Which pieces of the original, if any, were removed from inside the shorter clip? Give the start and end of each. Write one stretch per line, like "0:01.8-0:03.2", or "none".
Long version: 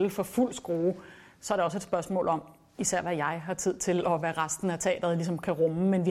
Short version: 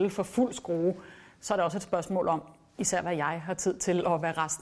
none

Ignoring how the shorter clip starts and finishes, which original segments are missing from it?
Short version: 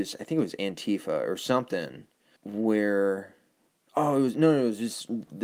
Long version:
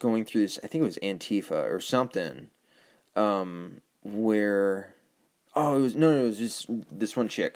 0:02.8-0:04.0

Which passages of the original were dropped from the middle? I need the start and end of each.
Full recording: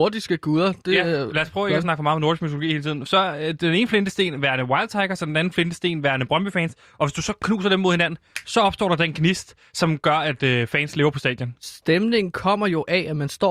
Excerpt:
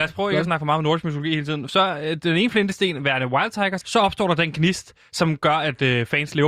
0:05.2-0:08.4

